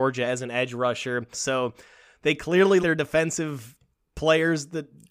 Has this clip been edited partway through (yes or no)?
yes